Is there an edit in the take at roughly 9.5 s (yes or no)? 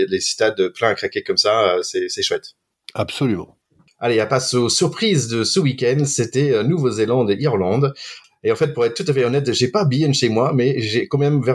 no